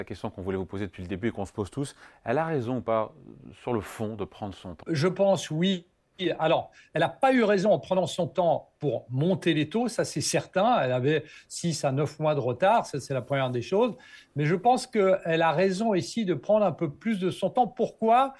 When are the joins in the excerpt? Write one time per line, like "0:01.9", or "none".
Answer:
0:04.8